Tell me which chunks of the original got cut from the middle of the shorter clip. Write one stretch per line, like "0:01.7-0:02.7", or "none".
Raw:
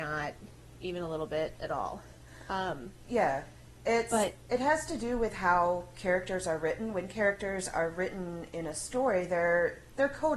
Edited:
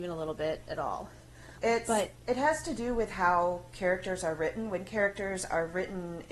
0:02.5-0:03.8

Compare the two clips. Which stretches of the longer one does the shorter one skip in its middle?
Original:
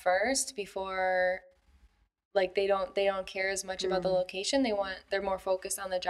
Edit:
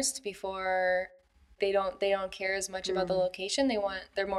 0:01.9-0:02.5

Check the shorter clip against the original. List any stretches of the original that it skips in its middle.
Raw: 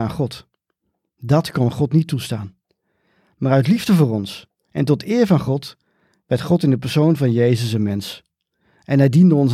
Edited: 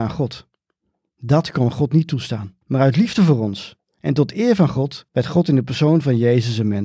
0:02.6-0:03.3
0:05.8-0:06.2

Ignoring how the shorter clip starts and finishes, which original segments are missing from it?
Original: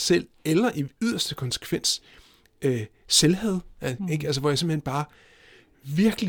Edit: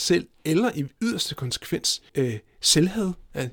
0:02.1-0:02.6

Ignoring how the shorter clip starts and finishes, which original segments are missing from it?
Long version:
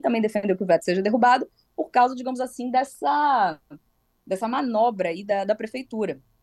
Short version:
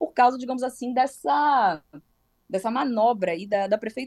none

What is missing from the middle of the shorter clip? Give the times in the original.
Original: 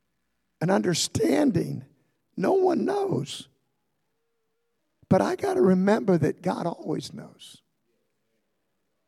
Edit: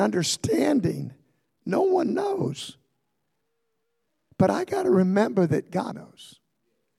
0:06.6-0:07.1

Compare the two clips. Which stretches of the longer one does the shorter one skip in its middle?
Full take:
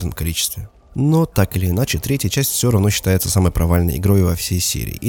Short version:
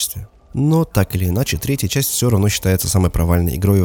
none

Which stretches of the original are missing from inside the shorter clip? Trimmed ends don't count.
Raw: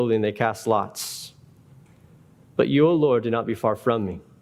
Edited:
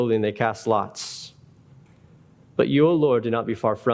none

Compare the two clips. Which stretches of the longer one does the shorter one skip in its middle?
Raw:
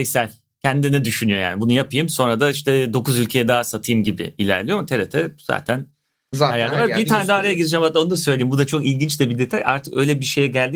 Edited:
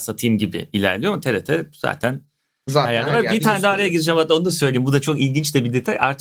none

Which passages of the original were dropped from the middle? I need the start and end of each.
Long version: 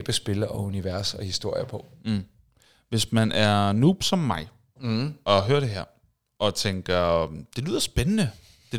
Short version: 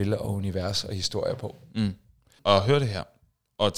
0:02.7-0:05.2

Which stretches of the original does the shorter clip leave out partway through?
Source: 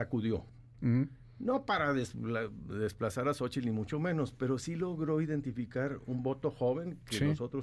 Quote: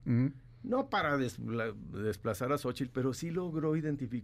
0:03.6-0:04.3

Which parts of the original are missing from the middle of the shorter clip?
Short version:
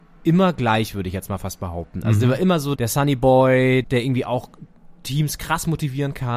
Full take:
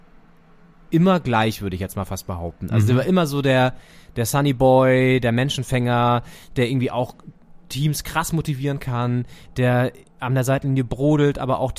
0:03.4-0:04.1
0:05.2-0:06.5

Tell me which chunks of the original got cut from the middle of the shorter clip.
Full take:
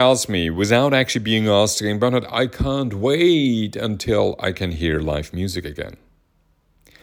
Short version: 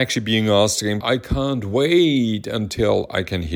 0:02.0-0:02.3

